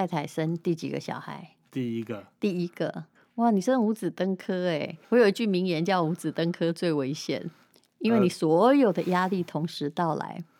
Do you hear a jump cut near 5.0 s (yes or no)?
yes